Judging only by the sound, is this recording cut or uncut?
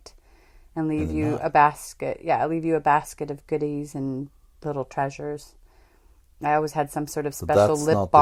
uncut